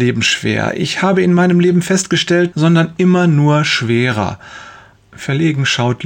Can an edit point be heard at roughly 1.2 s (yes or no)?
no